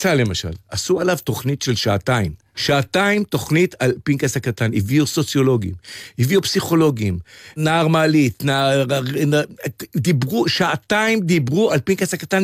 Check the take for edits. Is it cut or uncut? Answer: cut